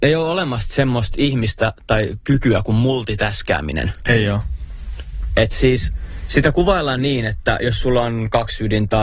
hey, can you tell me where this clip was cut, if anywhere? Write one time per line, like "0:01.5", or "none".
none